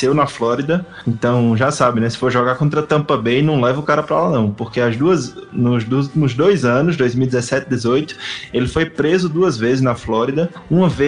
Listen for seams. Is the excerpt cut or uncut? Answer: uncut